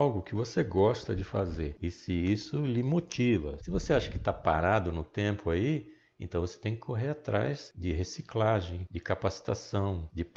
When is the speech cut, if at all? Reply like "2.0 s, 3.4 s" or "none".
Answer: 3.6 s